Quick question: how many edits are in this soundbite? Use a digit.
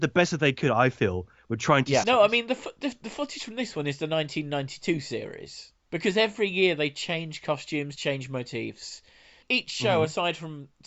2